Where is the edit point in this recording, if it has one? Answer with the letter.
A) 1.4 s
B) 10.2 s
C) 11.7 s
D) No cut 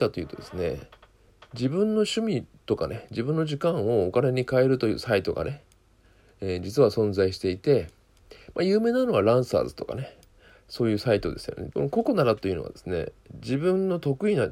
C